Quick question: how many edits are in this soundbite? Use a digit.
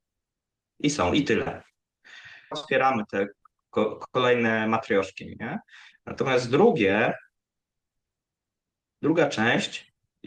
2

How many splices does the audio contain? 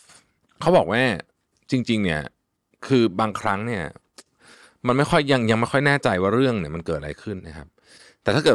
1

